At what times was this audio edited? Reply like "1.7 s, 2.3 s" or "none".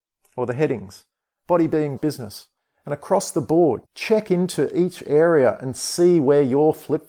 2.0 s, 3.8 s